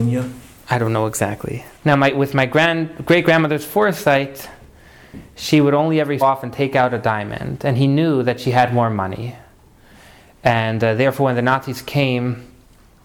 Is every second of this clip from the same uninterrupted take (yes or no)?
no